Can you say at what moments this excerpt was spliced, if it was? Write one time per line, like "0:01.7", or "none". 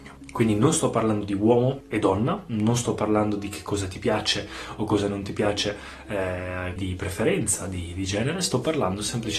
0:06.8